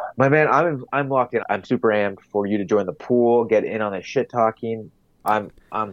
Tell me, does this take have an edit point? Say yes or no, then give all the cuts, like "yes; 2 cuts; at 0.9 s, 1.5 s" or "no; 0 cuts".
yes; 1 cut; at 1.4 s